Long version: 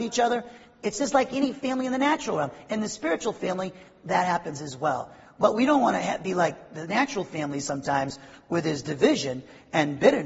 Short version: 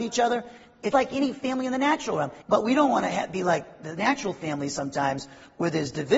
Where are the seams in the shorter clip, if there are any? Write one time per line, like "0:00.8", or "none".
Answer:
0:00.9
0:02.4